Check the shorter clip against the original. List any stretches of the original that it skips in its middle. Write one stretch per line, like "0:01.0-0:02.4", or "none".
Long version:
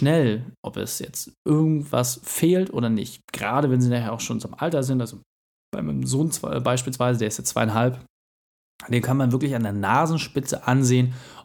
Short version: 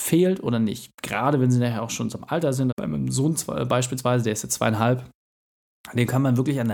0:05.0-0:05.7